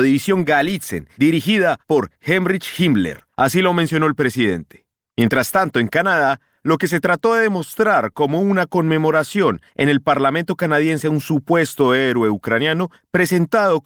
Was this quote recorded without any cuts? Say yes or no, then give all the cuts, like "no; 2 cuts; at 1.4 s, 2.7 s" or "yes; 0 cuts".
no; 2 cuts; at 3.3 s, 5.1 s